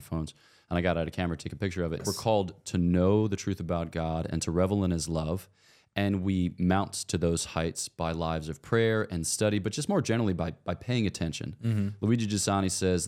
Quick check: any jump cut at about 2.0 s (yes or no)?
yes